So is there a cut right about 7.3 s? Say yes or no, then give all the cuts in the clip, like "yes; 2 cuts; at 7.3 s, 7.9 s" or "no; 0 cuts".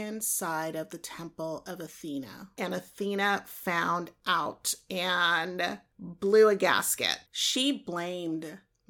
yes; 1 cut; at 7.3 s